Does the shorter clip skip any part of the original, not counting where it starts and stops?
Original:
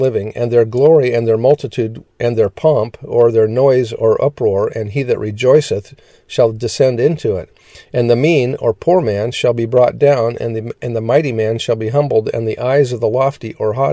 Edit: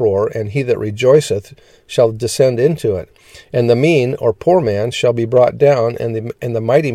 no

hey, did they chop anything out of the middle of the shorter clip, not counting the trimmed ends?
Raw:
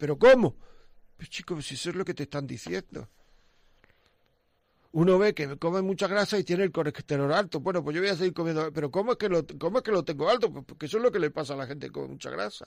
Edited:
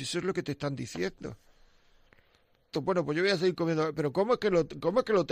yes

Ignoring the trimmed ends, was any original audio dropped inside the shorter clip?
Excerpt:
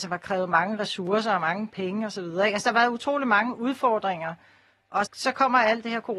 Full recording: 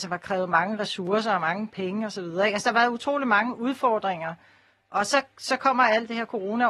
yes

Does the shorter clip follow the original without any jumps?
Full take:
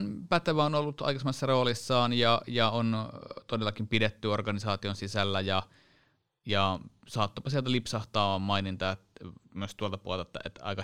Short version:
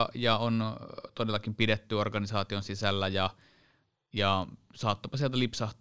yes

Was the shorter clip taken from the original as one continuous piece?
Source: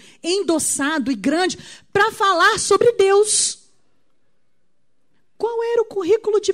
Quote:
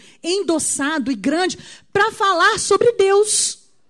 yes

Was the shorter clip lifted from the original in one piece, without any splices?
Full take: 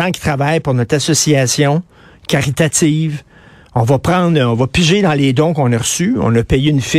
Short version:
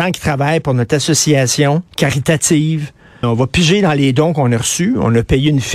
no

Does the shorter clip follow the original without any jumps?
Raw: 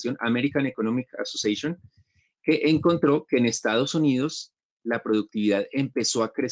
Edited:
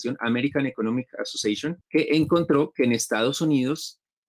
no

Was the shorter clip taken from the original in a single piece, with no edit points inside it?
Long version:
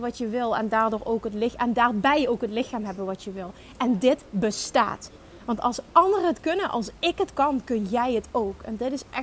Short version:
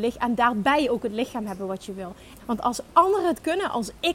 no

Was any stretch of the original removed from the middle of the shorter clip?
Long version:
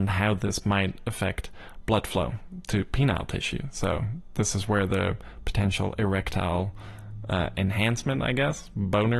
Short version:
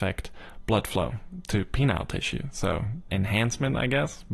yes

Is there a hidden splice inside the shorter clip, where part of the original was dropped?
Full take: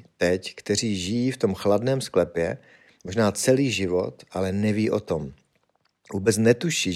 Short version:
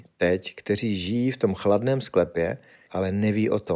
yes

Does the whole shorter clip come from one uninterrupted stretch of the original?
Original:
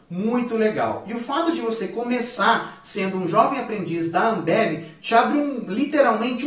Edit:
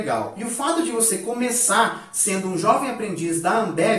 yes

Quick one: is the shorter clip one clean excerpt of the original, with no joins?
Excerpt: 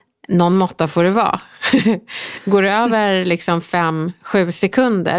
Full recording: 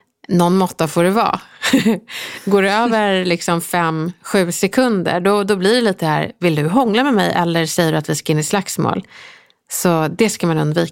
yes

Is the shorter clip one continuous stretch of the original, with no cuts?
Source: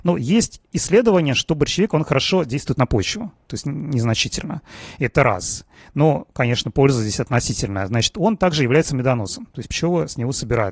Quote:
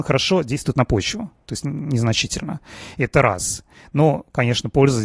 yes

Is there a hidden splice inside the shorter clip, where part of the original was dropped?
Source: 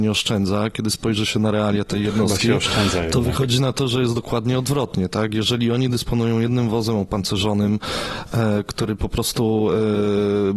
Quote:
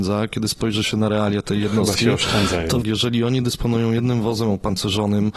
yes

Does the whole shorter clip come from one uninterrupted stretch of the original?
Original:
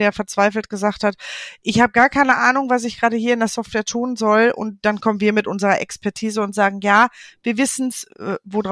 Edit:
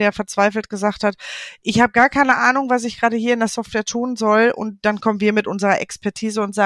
yes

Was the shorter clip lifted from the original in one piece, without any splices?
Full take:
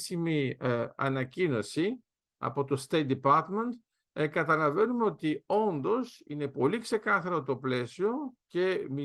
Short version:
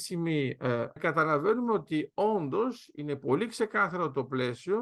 no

